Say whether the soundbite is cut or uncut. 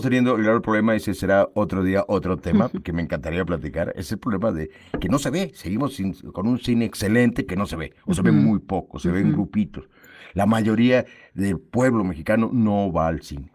uncut